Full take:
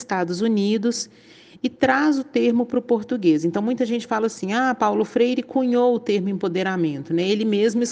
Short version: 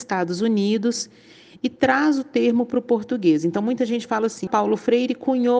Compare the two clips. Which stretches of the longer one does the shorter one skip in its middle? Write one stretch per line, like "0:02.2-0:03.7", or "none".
0:04.5-0:04.8